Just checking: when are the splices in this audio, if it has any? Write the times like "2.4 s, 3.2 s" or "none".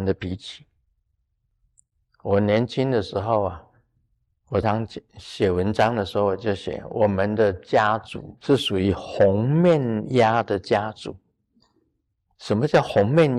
4.6 s, 8.4 s